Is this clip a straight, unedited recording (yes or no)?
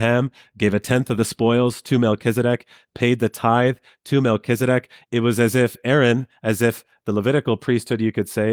yes